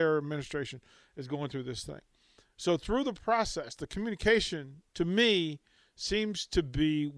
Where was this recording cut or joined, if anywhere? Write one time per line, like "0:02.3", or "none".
0:04.9